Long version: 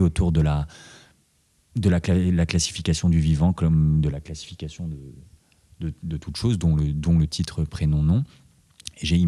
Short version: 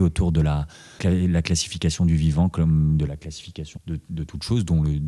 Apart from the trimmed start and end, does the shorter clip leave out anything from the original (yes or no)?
yes